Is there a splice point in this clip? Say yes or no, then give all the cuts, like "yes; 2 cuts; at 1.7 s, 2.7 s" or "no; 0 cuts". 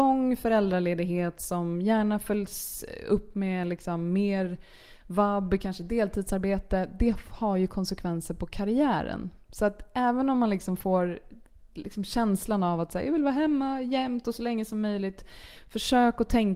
no; 0 cuts